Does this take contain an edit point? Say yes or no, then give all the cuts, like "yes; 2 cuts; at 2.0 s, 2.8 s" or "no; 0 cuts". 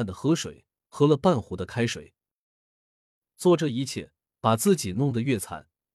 no; 0 cuts